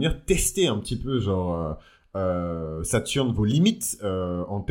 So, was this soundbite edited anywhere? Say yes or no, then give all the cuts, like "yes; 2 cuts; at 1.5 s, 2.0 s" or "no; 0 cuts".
no; 0 cuts